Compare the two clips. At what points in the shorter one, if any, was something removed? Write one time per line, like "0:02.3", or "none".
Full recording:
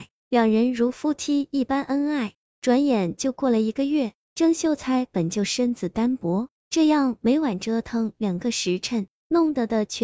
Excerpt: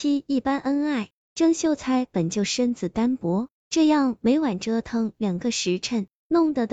0:01.3